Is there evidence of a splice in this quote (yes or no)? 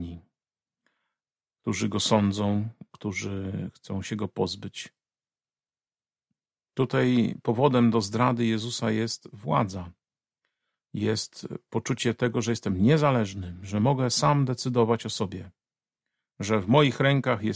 no